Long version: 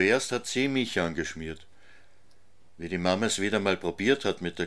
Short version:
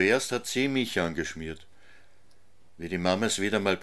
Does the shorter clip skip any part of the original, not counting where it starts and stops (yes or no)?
no